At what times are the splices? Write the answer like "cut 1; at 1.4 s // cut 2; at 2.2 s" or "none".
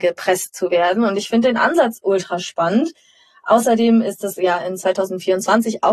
none